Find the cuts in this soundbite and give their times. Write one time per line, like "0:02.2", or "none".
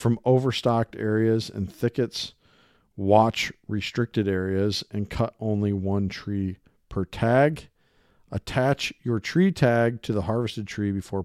none